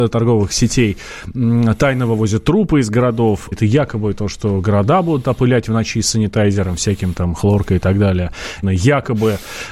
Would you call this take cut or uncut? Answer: cut